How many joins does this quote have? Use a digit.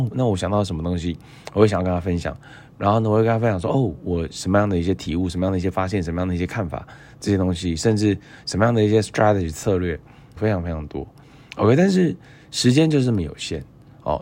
1